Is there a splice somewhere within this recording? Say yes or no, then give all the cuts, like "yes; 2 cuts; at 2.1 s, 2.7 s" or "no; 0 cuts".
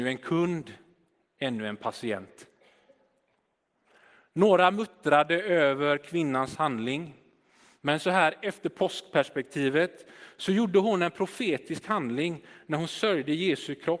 no; 0 cuts